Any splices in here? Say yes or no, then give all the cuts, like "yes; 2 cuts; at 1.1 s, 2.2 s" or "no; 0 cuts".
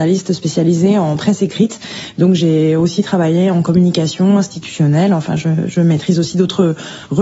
no; 0 cuts